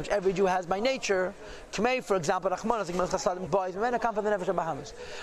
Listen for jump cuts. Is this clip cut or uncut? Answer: cut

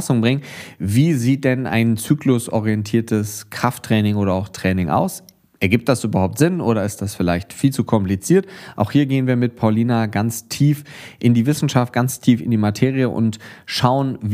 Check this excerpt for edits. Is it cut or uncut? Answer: uncut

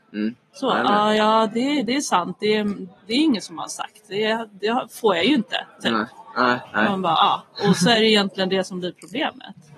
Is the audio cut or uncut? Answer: uncut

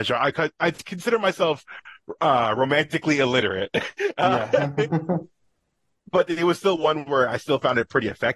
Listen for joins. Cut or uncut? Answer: uncut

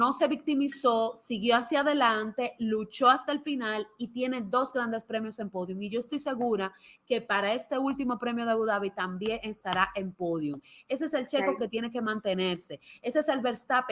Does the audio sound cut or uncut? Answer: uncut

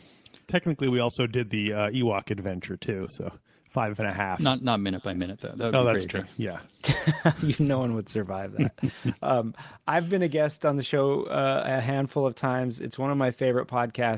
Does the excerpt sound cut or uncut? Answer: uncut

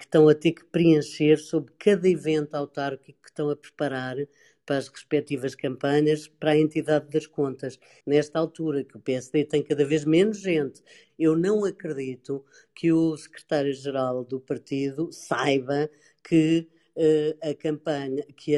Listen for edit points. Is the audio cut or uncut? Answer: cut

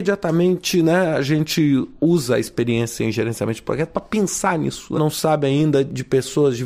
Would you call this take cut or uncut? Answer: cut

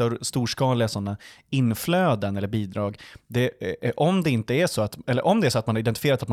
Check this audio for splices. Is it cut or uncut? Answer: uncut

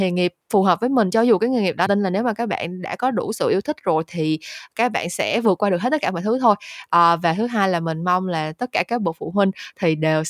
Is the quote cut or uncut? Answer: cut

